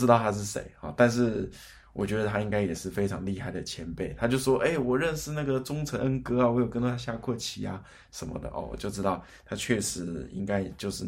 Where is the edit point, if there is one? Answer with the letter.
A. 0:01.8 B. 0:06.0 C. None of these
B